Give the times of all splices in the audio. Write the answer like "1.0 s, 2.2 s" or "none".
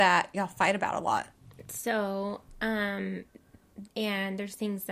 3.9 s